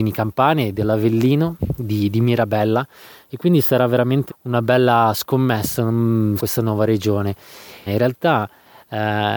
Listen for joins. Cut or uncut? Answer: cut